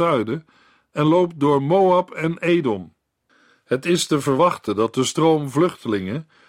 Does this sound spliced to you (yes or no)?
no